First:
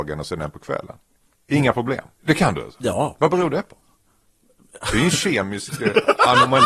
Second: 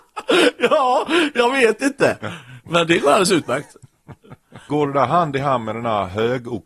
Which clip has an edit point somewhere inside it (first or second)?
first